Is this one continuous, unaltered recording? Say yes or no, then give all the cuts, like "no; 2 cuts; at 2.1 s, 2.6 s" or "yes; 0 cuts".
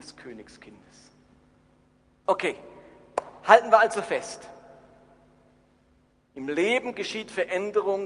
no; 1 cut; at 2.3 s